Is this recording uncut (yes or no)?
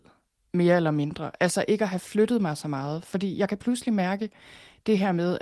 yes